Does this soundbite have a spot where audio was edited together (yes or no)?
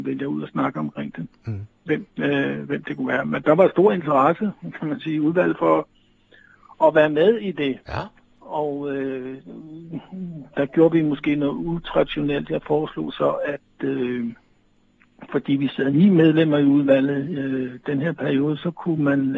yes